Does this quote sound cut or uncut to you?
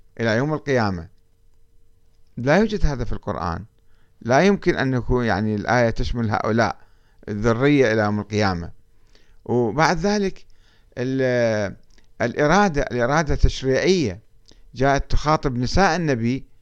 uncut